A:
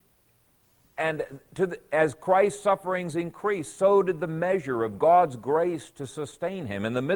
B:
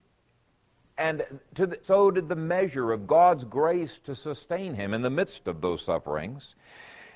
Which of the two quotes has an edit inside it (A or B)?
B